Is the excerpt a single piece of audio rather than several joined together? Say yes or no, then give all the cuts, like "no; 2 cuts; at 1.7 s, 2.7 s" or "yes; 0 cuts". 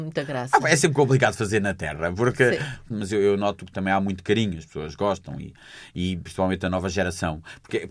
no; 1 cut; at 2.9 s